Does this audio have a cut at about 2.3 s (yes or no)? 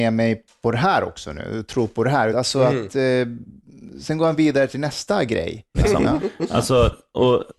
yes